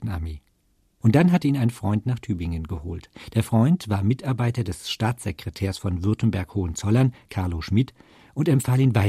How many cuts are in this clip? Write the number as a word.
zero